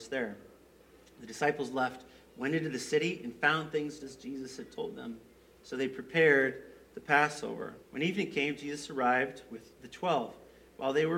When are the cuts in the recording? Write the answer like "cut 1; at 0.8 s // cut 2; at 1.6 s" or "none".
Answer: cut 1; at 4.0 s // cut 2; at 7.8 s